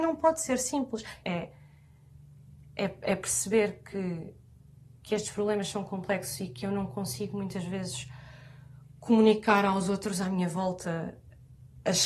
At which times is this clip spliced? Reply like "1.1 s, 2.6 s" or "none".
1.2 s